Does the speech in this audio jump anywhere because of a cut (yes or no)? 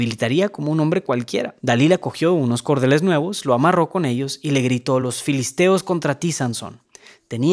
no